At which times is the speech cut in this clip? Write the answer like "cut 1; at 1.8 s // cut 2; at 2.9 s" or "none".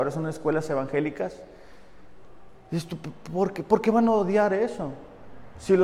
none